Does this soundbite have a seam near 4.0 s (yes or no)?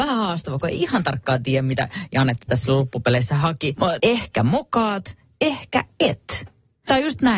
yes